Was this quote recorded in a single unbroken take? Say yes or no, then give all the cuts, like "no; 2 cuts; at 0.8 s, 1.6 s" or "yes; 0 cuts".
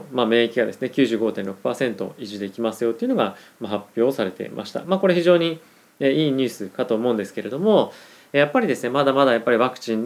yes; 0 cuts